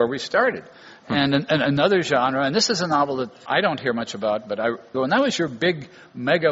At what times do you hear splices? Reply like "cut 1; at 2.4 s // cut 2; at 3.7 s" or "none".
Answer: cut 1; at 3.5 s // cut 2; at 4.9 s